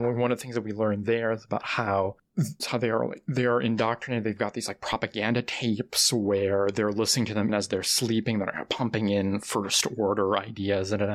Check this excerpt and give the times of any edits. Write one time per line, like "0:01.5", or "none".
0:02.6
0:07.5